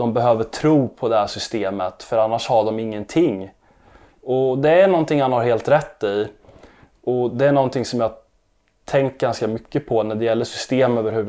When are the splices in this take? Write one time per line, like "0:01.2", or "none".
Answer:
none